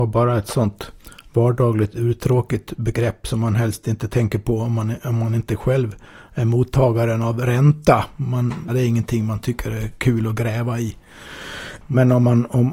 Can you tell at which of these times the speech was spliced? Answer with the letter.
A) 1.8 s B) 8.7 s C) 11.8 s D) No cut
B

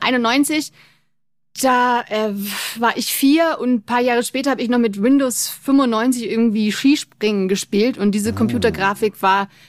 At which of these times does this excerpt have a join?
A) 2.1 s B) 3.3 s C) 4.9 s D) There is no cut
D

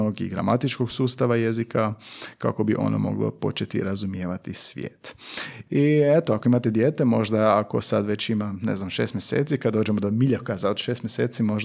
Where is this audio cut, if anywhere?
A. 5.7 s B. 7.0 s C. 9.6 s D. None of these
A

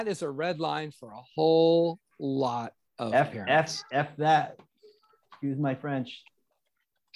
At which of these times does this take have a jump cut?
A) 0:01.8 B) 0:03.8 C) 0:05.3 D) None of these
D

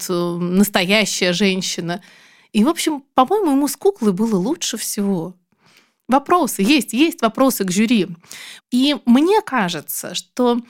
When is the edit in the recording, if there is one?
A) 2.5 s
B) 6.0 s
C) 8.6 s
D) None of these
C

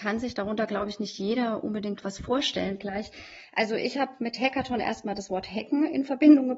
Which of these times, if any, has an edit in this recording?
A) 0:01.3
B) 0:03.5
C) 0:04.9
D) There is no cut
D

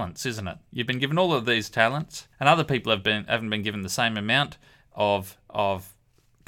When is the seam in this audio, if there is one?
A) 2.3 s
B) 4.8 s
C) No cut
A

